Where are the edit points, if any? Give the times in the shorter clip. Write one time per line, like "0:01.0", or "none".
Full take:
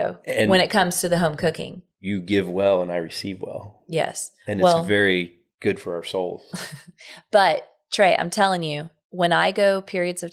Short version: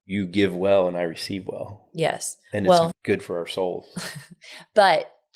0:02.9

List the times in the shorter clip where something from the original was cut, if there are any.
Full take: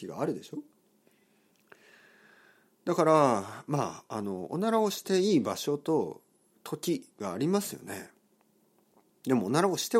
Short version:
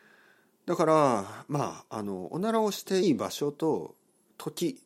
0:03.0

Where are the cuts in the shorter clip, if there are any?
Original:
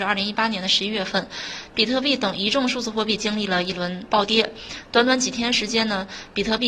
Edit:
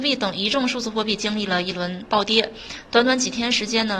none

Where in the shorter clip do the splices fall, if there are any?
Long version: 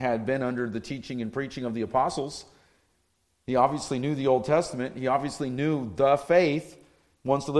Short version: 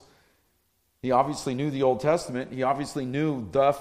none

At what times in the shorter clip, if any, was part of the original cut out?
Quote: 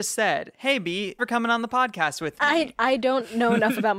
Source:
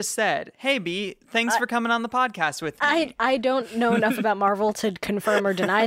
0:01.2

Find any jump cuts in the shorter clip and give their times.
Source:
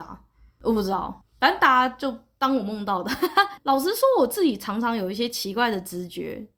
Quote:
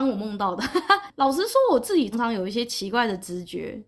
0:02.1

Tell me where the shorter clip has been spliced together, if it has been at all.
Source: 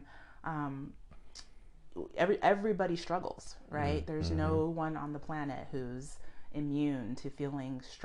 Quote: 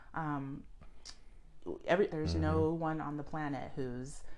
0:02.1

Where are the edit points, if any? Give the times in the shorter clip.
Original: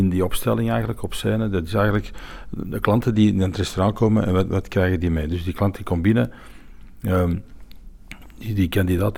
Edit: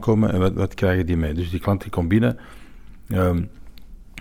none

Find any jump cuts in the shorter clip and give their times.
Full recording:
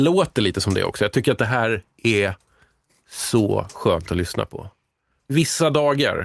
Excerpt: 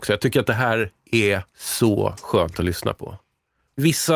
0:01.5

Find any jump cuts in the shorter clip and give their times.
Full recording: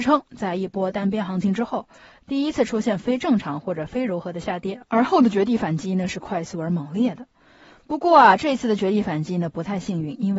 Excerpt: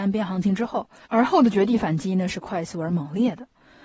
0:01.1

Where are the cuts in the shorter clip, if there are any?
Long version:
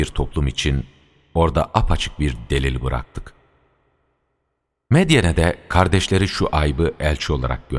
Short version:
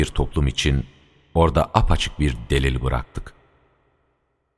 none

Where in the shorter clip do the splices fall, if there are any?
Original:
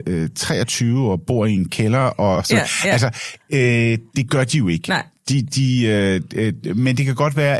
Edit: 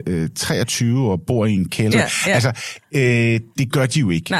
0:01.9

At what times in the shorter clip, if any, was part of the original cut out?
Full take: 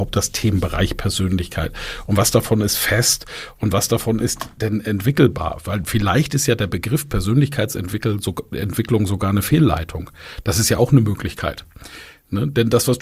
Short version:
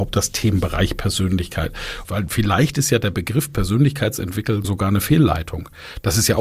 0:02.0
0:04.6

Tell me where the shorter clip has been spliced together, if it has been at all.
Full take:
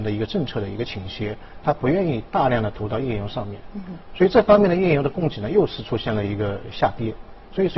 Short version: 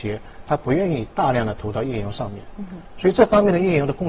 none

